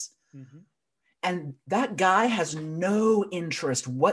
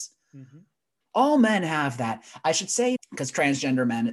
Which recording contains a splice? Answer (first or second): second